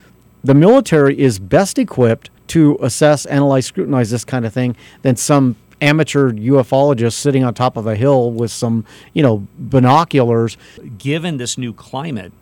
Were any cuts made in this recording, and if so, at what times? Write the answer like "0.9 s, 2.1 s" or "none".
2.4 s, 10.8 s